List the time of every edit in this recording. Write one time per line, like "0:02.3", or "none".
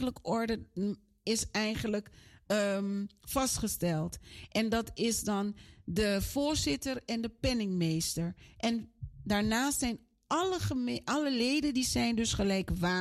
none